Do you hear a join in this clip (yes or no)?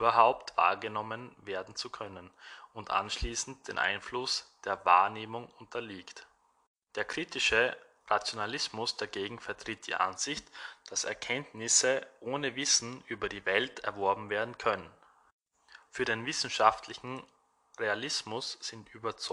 yes